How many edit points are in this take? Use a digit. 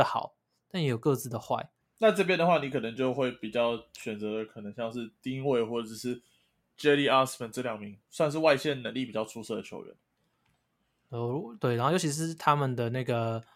1